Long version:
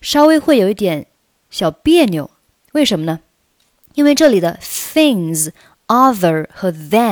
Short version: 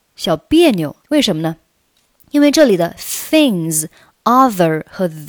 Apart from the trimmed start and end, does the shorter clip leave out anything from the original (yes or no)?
yes